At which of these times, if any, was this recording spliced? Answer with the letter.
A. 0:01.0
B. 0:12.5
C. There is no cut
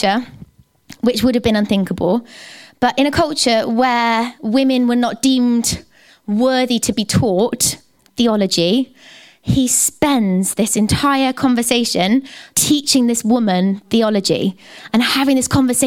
B